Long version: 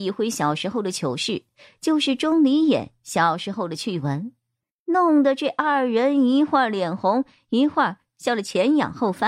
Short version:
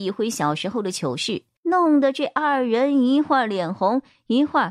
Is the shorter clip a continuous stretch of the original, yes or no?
no